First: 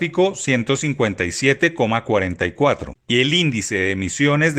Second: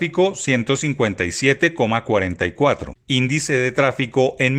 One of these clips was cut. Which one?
first; 1 cut; at 2.9 s

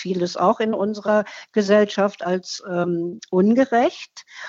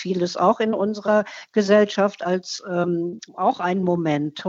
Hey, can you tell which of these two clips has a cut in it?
second; 1 cut; at 3.3 s

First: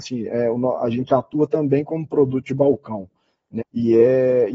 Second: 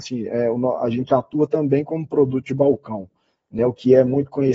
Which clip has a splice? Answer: first; 1 cut; at 3.6 s

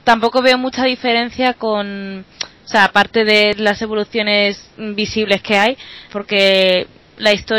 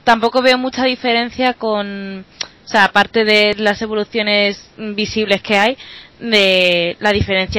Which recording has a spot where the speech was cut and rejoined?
first; 1 cut; at 6.1 s

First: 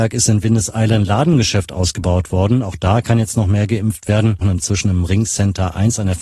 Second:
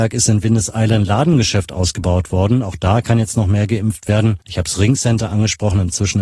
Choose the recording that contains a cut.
first; 1 cut; at 4.4 s

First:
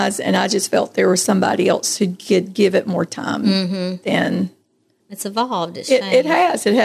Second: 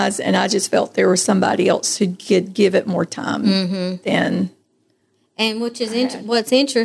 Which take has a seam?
first; 1 cut; at 5.0 s

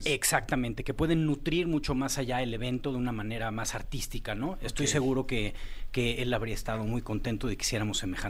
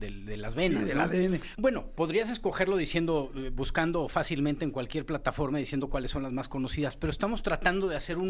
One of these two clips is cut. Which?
second; 1 cut; at 1.5 s

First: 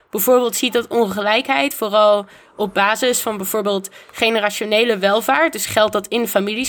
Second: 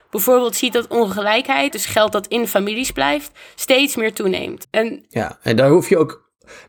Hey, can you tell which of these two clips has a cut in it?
second; 2 cuts; at 1.7 s, 4.6 s

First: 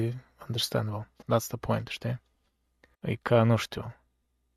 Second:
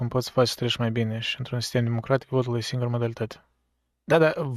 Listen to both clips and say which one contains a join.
first; 2 cuts; at 1.2 s, 2.9 s

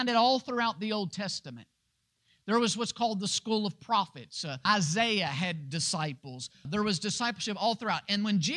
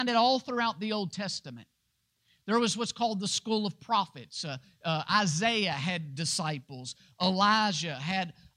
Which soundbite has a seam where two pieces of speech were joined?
first; 2 cuts; at 4.7 s, 6.6 s

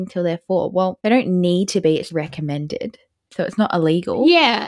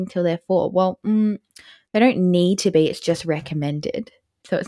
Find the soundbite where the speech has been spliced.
first; 2 cuts; at 1.0 s, 2.1 s

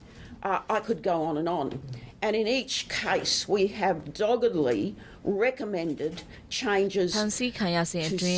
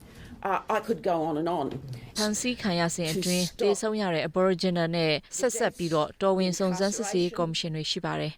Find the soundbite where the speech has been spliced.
second; 2 cuts; at 2.2 s, 5.3 s

